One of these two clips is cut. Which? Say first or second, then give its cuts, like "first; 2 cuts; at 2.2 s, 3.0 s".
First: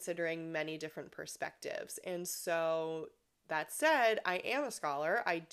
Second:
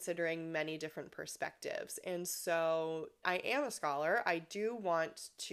second; 1 cut; at 3.2 s